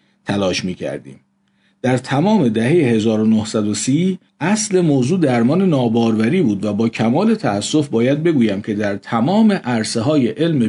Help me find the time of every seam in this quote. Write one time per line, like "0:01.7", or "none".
0:04.3